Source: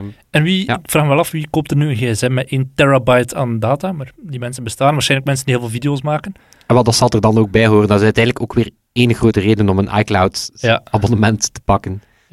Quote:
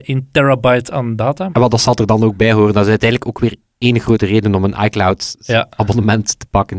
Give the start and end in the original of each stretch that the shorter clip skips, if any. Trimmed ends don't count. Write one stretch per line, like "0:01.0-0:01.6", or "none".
0:03.9-0:06.6